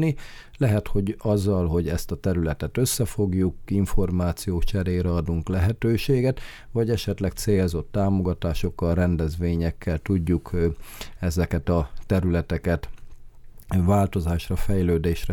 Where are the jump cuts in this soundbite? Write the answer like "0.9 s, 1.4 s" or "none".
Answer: 3.7 s